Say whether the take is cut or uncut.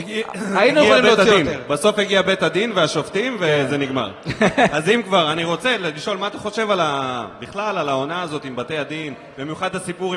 uncut